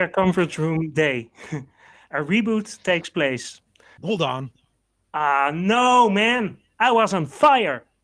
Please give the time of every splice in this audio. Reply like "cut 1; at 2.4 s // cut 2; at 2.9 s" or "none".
cut 1; at 4.0 s